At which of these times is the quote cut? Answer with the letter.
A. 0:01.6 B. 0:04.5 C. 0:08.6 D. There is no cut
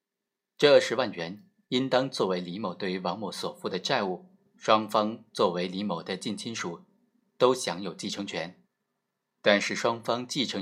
B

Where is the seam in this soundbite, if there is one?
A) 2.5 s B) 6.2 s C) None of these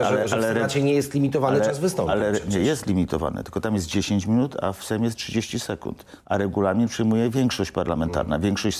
B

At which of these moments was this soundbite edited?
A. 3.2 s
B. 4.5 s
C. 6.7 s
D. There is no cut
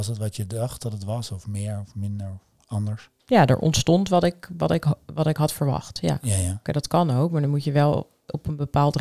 C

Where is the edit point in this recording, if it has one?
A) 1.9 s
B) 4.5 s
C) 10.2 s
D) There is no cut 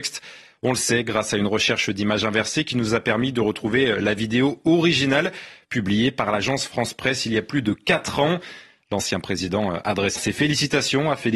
C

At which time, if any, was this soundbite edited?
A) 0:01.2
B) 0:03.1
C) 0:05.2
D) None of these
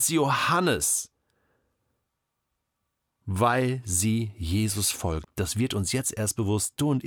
C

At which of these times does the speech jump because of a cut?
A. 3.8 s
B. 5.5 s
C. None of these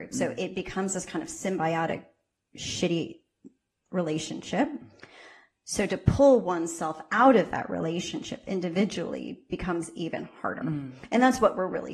C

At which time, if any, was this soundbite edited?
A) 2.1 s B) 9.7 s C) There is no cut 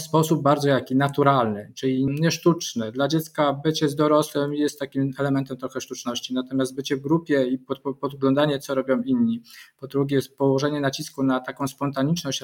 A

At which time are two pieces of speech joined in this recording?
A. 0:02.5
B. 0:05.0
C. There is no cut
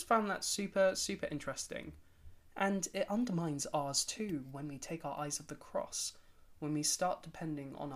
A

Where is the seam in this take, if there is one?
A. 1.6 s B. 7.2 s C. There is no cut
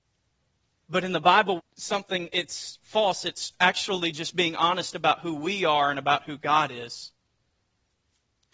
A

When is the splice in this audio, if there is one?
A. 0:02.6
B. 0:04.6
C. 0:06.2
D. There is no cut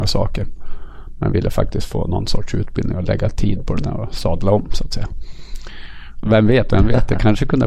C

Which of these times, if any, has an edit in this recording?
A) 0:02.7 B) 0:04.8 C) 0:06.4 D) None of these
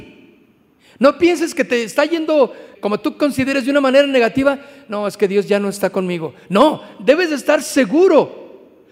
A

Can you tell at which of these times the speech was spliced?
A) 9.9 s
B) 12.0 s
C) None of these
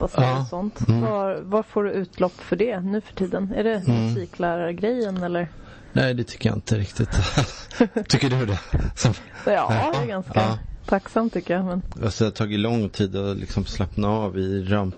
A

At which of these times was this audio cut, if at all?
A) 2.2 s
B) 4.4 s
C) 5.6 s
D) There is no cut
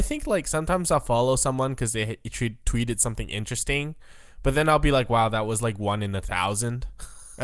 D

